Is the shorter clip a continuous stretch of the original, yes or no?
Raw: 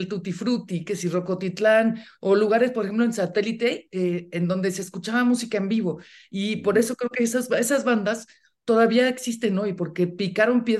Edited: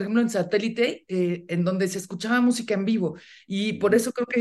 yes